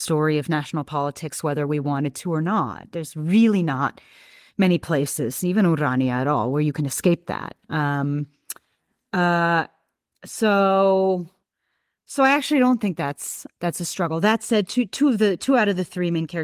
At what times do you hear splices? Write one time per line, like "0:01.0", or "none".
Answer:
none